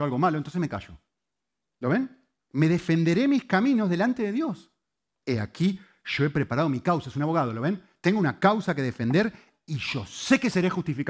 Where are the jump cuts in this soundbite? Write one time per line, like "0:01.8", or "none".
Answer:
0:01.6
0:05.2